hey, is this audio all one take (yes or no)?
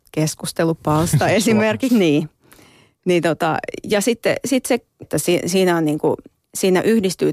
no